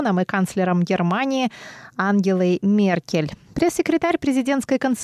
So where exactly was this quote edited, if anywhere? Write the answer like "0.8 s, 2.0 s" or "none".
3.5 s